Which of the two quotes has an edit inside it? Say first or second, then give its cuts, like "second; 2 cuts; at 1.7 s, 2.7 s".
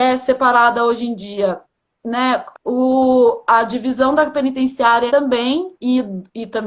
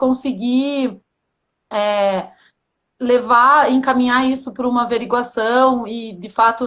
first; 2 cuts; at 2.5 s, 5.1 s